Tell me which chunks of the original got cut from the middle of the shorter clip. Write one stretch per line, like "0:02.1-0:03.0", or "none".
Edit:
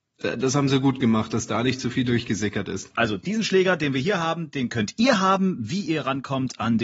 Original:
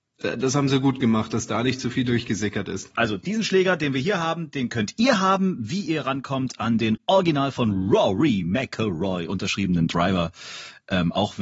none